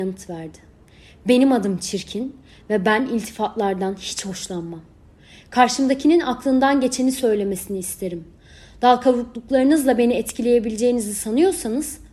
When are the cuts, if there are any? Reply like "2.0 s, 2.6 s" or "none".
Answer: none